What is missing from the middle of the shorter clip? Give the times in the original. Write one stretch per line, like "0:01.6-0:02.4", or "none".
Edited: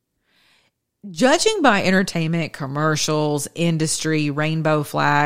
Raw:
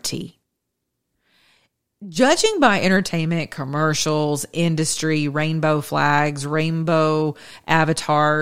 none